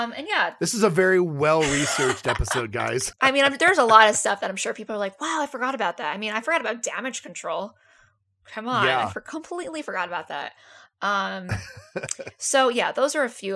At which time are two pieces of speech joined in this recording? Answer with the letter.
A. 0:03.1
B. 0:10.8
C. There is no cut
A